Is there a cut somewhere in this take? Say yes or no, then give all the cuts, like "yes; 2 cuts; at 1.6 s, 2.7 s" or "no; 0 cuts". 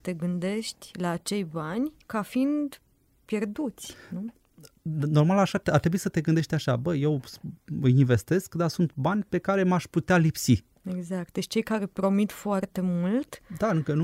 yes; 2 cuts; at 2.0 s, 10.8 s